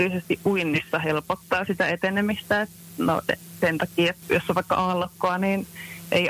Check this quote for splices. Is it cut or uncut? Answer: cut